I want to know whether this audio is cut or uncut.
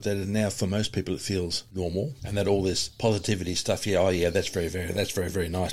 cut